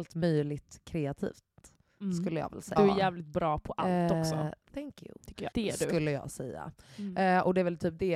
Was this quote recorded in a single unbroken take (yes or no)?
no